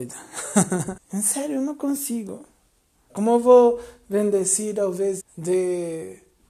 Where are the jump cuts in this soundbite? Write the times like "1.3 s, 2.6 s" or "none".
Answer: 1.0 s, 3.1 s, 5.2 s

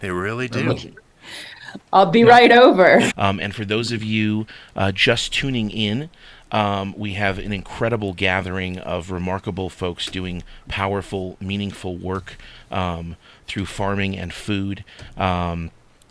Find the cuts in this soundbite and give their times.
3.1 s

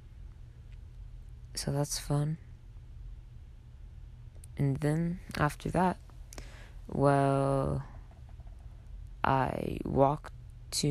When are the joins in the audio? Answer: none

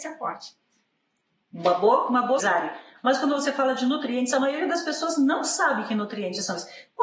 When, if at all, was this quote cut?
2.4 s

